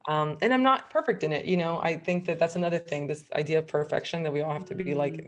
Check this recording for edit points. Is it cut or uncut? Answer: uncut